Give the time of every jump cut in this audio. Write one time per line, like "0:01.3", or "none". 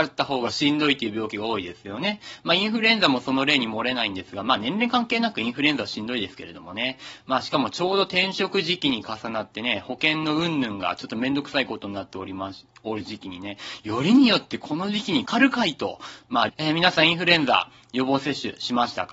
0:15.3
0:16.5